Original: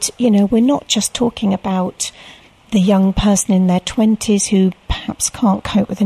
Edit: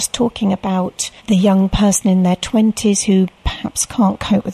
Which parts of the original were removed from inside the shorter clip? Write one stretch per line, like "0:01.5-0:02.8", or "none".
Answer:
0:02.2-0:02.6